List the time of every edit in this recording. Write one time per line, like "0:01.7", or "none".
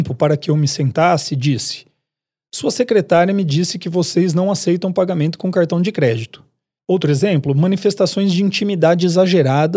0:06.8

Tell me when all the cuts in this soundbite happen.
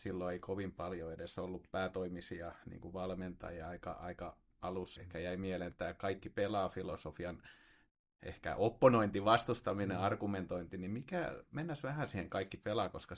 0:05.0

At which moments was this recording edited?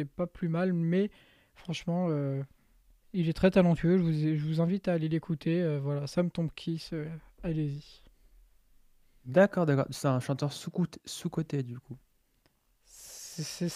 none

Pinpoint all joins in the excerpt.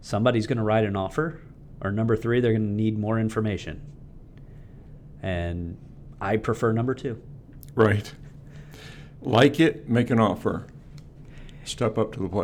none

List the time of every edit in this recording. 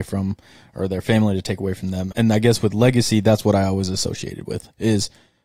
0:02.1

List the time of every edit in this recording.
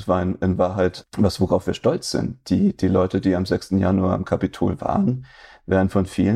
none

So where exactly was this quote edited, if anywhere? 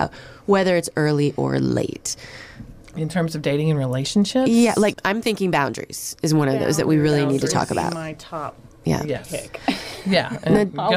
0:04.9

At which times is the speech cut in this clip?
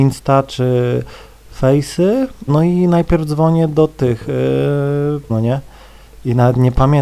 0:02.5
0:05.3

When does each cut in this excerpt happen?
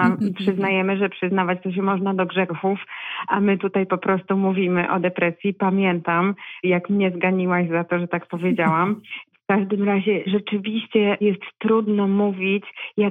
none

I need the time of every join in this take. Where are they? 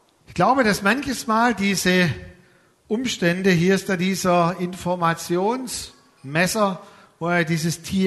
none

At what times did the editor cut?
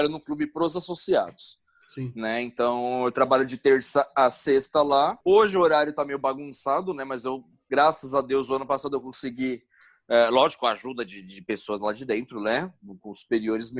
0:05.2

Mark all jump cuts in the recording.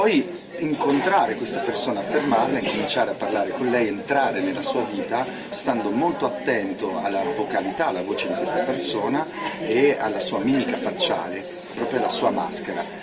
0:05.5
0:11.7

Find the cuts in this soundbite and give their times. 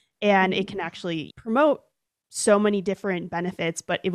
0:01.3

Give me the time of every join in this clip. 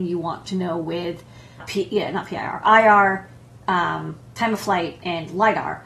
0:01.6

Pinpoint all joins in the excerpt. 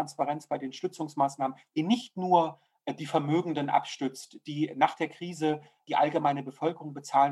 0:01.7

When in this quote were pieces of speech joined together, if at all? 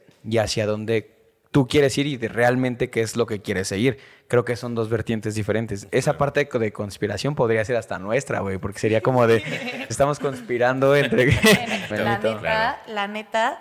0:09.9
0:11.9

